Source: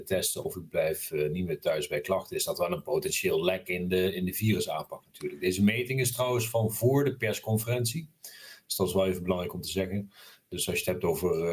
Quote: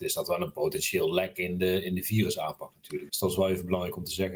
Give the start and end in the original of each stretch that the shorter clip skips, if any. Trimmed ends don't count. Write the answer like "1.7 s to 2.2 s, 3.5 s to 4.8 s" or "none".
5.4 s to 8.7 s